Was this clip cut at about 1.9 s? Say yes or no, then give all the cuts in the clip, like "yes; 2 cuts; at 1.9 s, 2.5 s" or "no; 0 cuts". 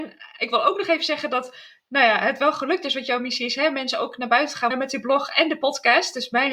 no; 1 cut; at 4.7 s